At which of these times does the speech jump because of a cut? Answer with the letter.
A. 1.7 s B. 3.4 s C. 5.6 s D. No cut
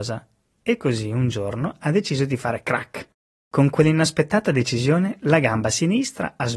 B